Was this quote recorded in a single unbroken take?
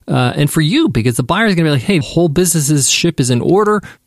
no; 1 cut; at 2.0 s

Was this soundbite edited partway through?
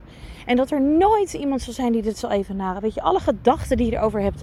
no; 0 cuts

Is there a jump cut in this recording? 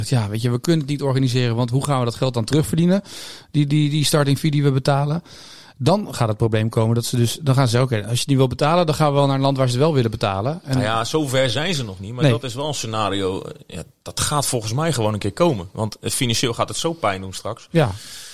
no; 0 cuts

